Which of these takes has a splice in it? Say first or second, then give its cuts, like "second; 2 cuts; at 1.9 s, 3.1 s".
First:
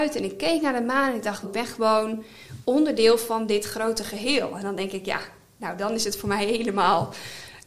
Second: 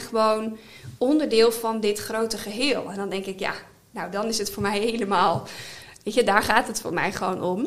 first; 1 cut; at 1.4 s